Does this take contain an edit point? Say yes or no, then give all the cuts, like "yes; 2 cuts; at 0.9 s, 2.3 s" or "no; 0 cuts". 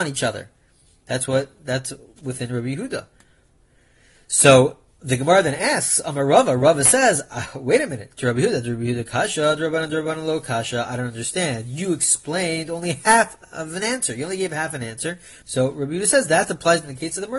yes; 1 cut; at 15.4 s